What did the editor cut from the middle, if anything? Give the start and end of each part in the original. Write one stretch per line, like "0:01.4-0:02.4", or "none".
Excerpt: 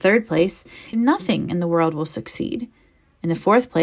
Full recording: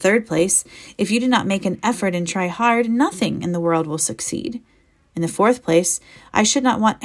0:00.9-0:02.9